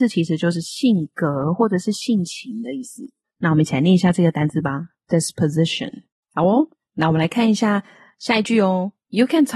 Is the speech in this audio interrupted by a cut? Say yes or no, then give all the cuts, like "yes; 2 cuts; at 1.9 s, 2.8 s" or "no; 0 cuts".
yes; 2 cuts; at 3.2 s, 6.2 s